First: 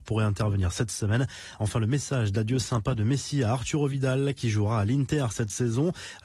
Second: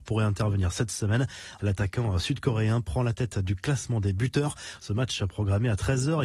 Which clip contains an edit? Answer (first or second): second